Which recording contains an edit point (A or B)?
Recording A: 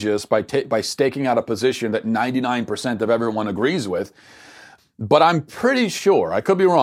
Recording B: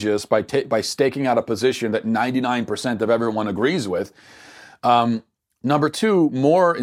A